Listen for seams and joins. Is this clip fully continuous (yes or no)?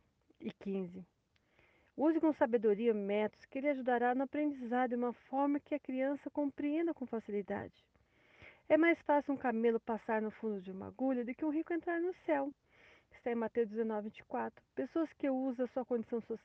yes